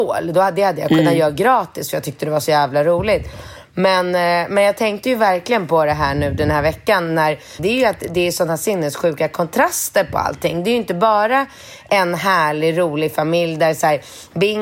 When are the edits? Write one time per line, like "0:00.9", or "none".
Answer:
0:07.6